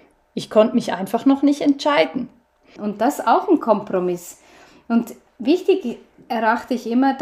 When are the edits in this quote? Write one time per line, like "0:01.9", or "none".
0:02.8